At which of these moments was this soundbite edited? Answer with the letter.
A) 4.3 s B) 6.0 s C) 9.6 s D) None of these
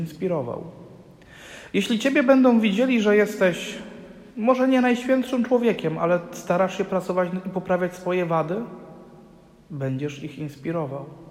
A